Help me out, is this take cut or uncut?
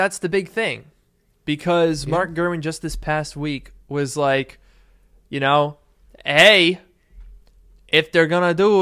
uncut